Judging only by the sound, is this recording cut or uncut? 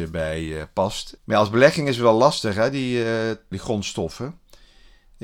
cut